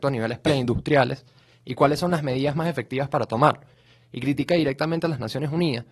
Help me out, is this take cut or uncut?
uncut